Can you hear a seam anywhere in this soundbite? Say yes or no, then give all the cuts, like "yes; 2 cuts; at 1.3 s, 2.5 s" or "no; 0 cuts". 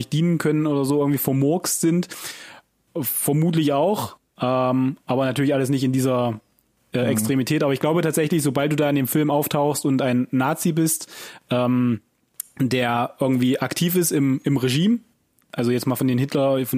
no; 0 cuts